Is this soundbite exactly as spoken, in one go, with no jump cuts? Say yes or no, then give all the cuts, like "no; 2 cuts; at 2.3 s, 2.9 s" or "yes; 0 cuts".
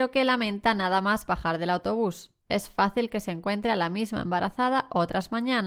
yes; 0 cuts